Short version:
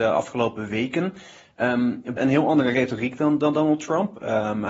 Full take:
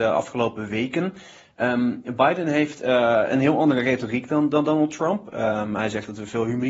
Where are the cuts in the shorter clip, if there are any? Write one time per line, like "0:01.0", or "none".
0:02.2